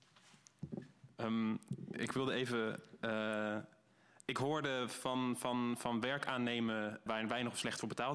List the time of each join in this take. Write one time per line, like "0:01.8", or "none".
0:07.1